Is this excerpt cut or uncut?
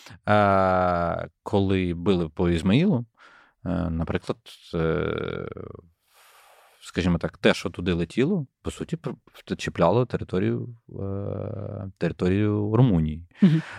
uncut